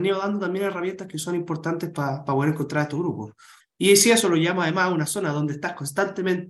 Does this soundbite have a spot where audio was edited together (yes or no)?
yes